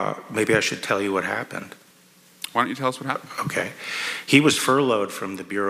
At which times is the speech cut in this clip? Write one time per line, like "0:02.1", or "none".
none